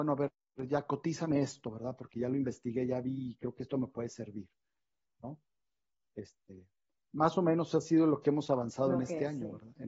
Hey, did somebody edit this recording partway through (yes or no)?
no